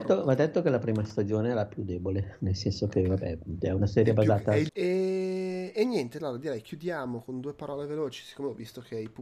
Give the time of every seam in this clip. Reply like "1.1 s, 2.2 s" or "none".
3.6 s, 4.7 s